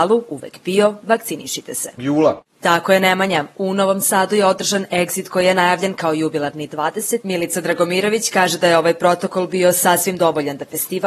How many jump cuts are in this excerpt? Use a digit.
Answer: 2